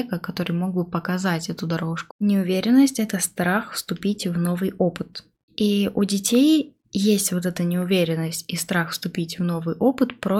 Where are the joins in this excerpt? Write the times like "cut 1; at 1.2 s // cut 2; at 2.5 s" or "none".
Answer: cut 1; at 2.1 s